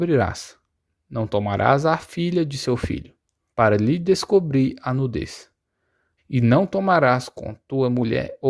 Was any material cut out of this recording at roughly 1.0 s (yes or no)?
no